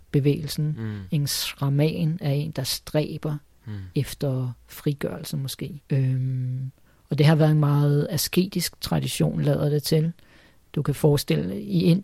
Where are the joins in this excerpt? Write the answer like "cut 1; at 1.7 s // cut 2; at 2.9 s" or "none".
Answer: cut 1; at 5.8 s